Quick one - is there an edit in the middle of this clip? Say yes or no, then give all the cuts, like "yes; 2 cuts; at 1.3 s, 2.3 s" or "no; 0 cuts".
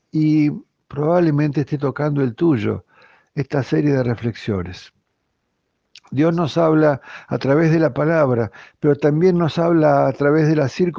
no; 0 cuts